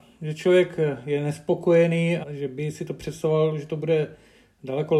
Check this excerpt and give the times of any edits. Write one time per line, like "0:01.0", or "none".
0:02.2